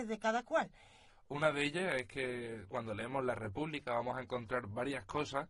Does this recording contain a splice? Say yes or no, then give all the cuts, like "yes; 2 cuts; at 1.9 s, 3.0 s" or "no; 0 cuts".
yes; 2 cuts; at 1.1 s, 2.7 s